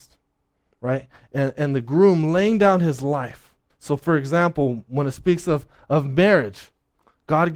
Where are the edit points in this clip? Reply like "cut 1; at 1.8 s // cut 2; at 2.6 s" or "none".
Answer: cut 1; at 3.7 s